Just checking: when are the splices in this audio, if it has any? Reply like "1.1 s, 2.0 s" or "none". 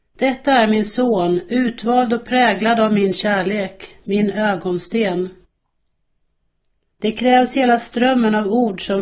6.9 s